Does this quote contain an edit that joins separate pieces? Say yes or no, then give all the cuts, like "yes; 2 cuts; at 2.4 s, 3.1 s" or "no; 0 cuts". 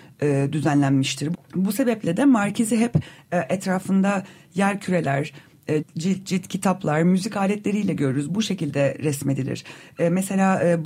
yes; 2 cuts; at 1.3 s, 5.8 s